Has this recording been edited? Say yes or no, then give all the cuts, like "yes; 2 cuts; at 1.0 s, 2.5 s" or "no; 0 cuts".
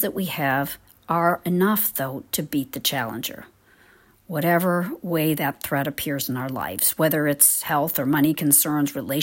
no; 0 cuts